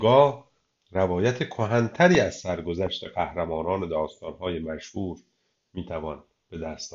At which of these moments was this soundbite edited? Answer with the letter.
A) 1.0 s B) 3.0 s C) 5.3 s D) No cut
D